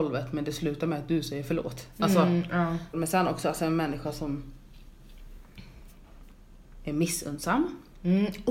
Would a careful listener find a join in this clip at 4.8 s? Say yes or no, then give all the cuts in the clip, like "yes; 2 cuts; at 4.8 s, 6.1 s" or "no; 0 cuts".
no; 1 cut; at 2.9 s